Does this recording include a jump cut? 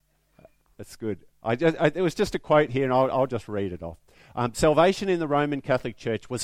no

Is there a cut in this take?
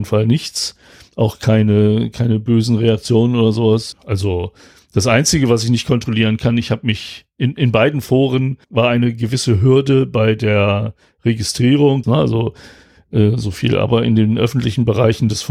yes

